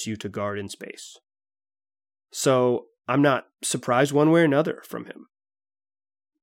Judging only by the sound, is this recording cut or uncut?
cut